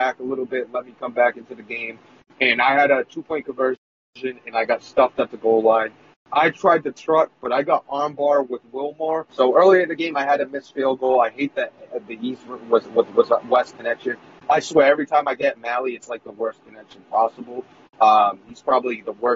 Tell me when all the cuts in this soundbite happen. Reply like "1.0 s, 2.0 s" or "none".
9.3 s